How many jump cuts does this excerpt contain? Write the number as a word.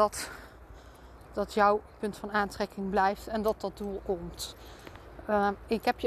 one